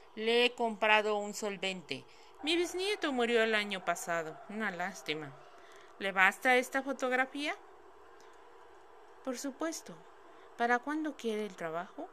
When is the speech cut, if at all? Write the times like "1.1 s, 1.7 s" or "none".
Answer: 2.4 s